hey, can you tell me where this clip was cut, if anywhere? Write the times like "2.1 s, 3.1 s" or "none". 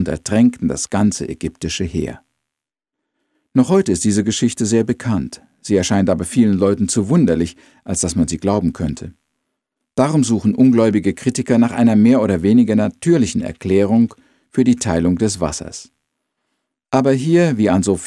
none